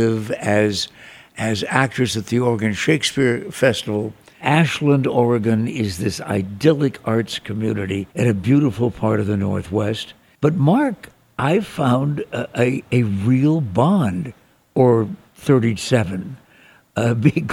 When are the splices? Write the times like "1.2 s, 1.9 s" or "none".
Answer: 4.4 s, 8.1 s, 10.3 s